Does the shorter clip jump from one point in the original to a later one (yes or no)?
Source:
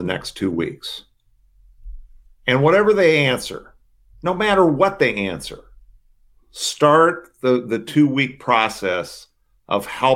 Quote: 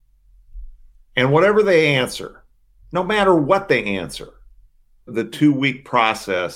yes